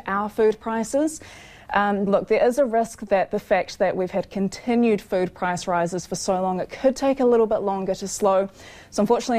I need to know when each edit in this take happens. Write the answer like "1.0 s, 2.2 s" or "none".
2.1 s